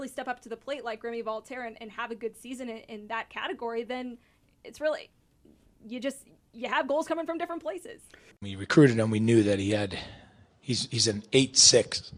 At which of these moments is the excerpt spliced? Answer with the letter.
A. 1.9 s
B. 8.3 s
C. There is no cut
B